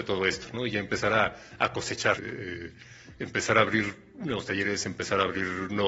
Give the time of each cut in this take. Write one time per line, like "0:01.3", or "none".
0:02.2